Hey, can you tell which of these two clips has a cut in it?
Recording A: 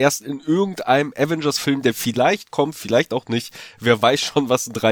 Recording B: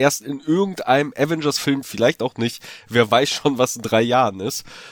B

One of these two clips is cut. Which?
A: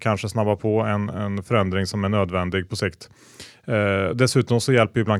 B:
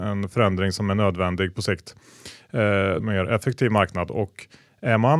B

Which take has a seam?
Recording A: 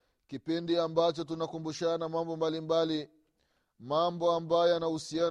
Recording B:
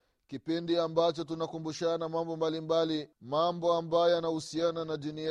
B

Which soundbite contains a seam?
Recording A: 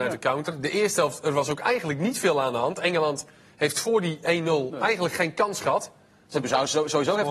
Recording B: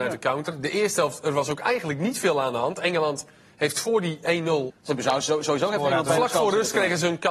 B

